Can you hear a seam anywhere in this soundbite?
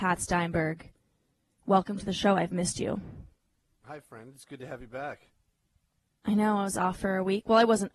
no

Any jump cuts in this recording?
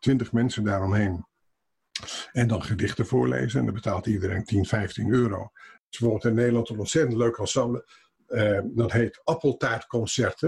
no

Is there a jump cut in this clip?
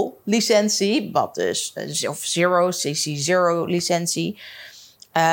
no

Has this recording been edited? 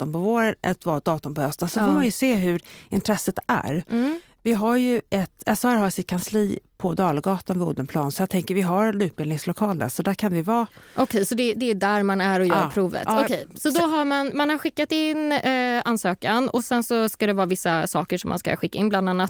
no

